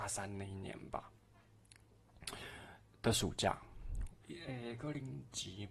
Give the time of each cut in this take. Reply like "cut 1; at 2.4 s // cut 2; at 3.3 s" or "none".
cut 1; at 4.2 s

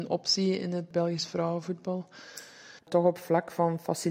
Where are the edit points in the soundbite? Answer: cut 1; at 2.8 s

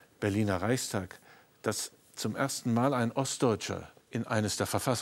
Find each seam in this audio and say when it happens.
cut 1; at 4.0 s

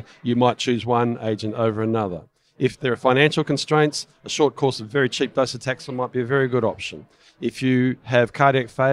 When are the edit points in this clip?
none

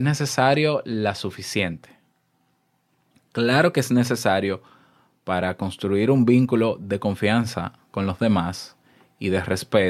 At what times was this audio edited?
none

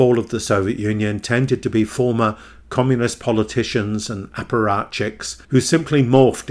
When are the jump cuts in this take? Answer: cut 1; at 5.4 s

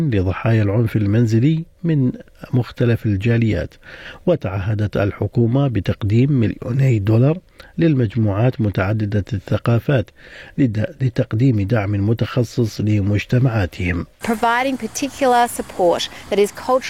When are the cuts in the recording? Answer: cut 1; at 14.1 s

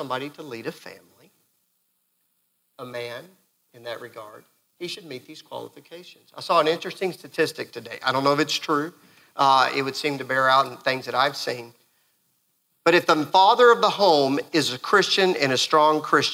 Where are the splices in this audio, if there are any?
none

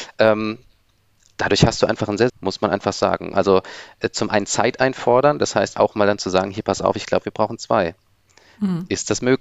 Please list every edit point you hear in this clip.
cut 1; at 2.3 s // cut 2; at 3.3 s // cut 3; at 5.8 s

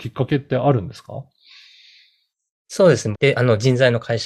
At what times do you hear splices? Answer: cut 1; at 3.1 s

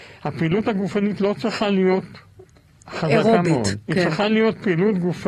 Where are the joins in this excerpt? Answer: none

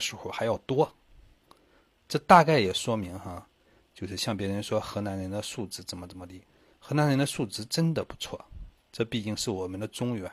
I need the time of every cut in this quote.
none

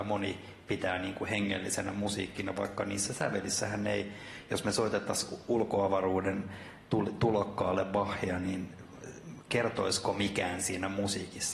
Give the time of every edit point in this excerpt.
none

